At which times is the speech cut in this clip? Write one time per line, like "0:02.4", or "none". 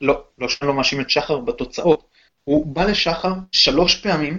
0:02.3